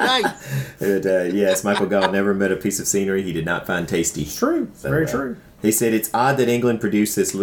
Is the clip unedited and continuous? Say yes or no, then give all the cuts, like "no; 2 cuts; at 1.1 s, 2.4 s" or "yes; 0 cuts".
yes; 0 cuts